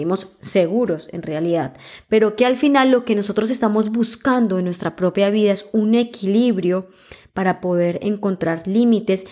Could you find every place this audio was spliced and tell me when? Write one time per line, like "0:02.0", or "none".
none

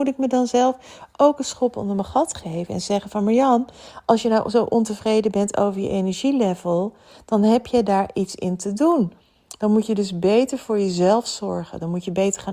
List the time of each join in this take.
none

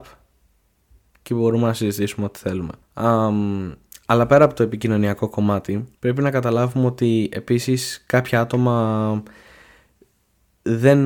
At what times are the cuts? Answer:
0:02.8
0:05.9

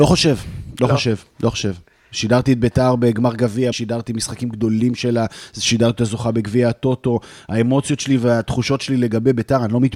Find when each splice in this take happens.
0:03.7

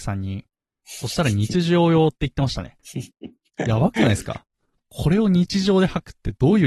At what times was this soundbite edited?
0:03.1

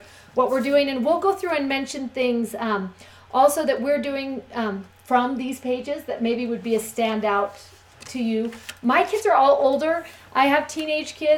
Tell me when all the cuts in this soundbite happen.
none

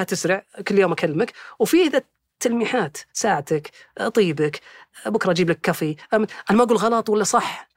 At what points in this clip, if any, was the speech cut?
none

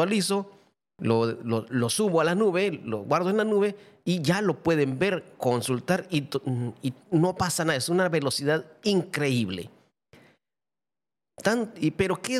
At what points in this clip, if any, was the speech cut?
0:01.7

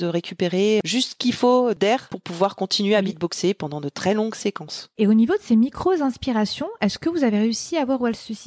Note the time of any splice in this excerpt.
none

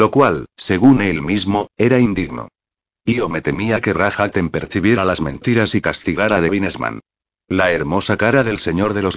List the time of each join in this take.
none

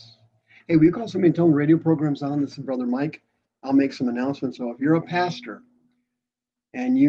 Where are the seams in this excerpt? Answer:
0:04.6

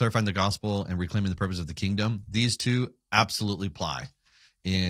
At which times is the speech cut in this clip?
none

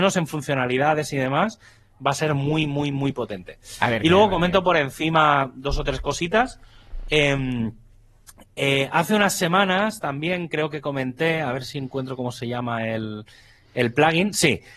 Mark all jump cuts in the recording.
none

